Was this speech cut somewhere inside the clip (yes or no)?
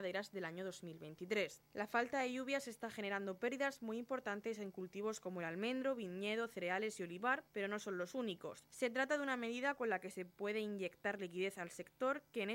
yes